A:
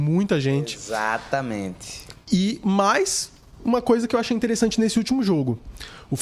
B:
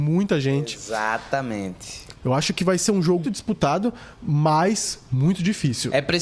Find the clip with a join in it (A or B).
B